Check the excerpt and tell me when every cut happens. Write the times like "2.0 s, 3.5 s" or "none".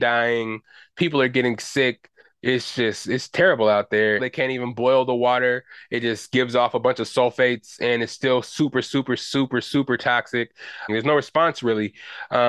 3.0 s, 4.2 s, 10.9 s